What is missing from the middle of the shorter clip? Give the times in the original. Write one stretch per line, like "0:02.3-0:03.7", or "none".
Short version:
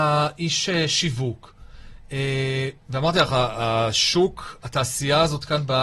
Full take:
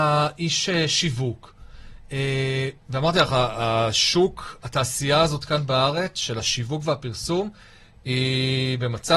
none